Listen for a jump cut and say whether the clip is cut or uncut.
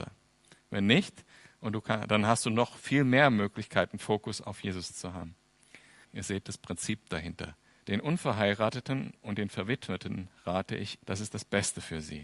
cut